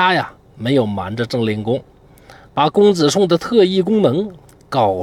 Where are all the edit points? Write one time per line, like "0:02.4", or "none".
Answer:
none